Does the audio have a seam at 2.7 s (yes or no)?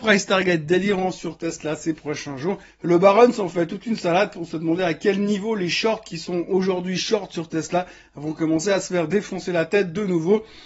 yes